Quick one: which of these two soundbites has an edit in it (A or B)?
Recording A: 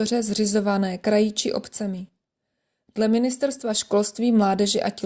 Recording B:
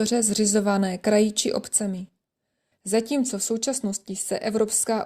B